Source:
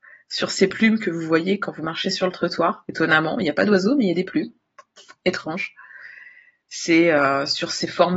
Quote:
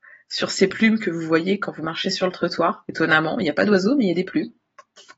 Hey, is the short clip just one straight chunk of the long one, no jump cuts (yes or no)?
yes